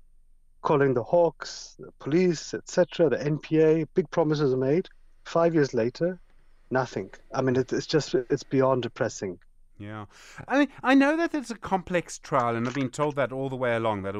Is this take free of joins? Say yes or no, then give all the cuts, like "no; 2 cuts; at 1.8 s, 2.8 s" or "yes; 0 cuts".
yes; 0 cuts